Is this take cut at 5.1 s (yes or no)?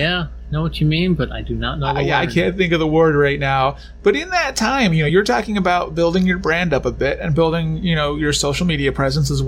no